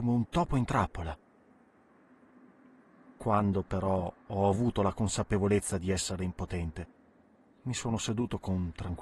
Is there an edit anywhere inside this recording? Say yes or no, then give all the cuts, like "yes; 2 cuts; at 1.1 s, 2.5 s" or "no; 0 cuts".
no; 0 cuts